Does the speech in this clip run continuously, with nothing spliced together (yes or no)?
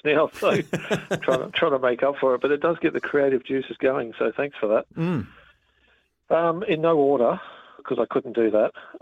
yes